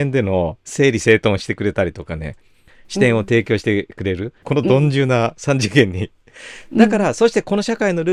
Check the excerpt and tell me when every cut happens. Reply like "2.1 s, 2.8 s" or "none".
4.4 s